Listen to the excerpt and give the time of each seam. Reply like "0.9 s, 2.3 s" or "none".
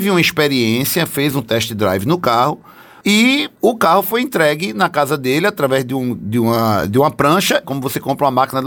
3.5 s, 7.6 s